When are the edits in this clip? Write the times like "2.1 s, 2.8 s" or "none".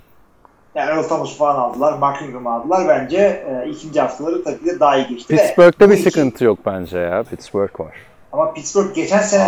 7.2 s